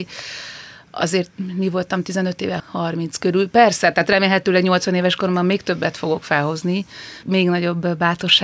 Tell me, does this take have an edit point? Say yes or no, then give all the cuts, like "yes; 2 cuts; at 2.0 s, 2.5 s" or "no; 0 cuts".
yes; 2 cuts; at 2.6 s, 7.2 s